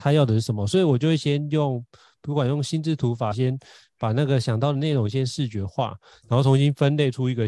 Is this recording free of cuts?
no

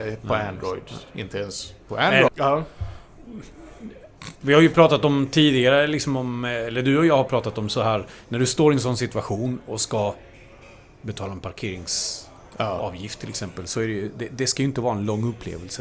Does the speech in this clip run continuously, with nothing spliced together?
no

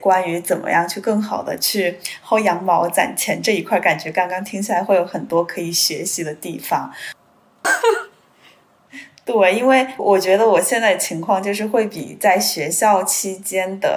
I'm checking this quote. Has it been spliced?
yes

